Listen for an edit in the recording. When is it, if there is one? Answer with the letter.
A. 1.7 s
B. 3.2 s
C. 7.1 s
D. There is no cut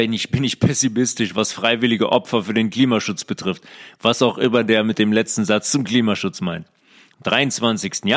D